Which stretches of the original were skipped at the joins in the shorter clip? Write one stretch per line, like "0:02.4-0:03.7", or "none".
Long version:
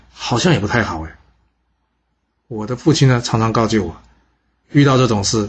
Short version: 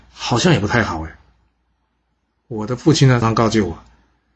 0:03.2-0:03.4